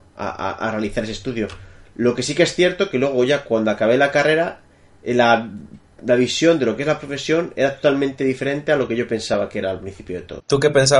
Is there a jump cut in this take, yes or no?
no